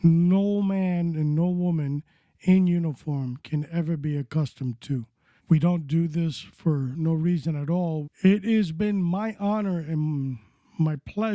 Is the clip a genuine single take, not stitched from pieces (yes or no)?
no